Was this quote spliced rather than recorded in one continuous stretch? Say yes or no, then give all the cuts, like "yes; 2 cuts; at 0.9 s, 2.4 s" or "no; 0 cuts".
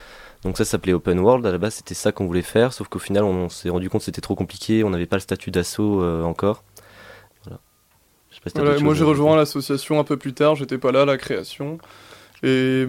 yes; 1 cut; at 7.3 s